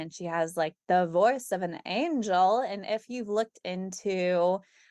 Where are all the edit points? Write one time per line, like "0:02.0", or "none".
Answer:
none